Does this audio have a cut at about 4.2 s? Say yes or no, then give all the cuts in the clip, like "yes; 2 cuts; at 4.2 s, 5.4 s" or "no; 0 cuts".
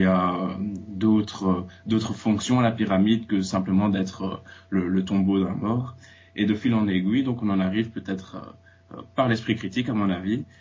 no; 0 cuts